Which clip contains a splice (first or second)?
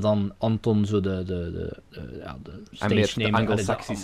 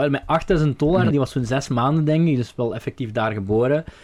second